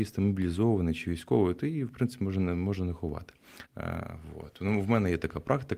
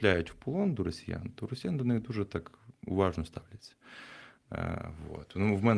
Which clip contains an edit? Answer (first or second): first